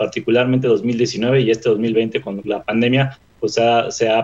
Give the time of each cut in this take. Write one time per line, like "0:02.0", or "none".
0:02.4